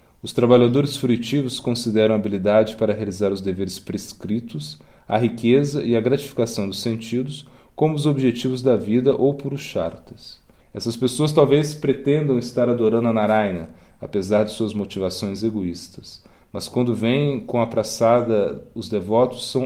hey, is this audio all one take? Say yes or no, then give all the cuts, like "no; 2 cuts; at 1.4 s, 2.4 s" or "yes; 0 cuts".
no; 1 cut; at 10.6 s